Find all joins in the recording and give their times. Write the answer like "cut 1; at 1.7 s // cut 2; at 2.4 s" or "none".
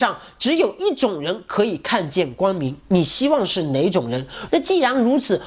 cut 1; at 4.5 s